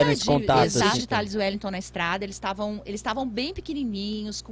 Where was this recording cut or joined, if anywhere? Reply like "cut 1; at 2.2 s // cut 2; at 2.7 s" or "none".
cut 1; at 1.0 s

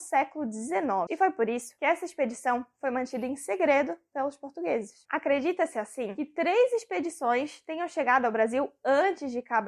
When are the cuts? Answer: cut 1; at 1.1 s // cut 2; at 5.1 s

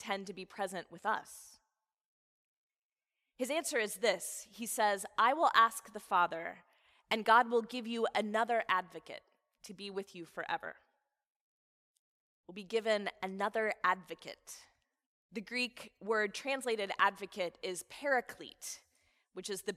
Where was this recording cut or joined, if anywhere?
cut 1; at 15.3 s

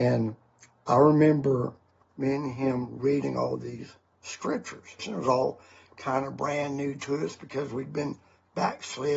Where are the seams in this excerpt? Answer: cut 1; at 5.0 s

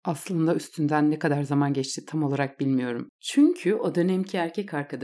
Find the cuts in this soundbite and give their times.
cut 1; at 3.1 s

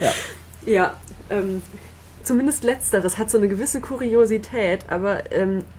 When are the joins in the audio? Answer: cut 1; at 2.2 s

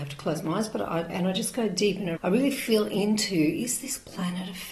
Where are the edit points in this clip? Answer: cut 1; at 1.1 s // cut 2; at 2.2 s

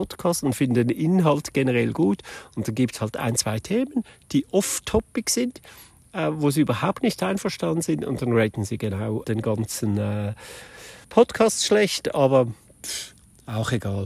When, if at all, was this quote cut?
cut 1; at 9.2 s // cut 2; at 11.0 s

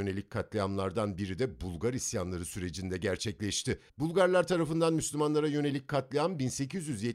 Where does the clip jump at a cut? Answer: cut 1; at 3.9 s

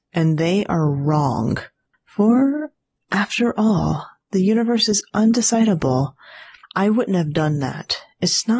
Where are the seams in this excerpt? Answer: cut 1; at 1.9 s // cut 2; at 6.6 s

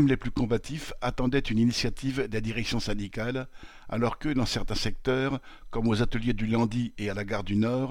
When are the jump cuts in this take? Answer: none

